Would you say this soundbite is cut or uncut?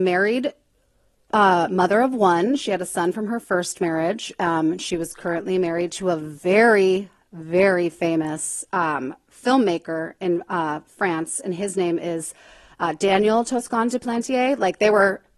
uncut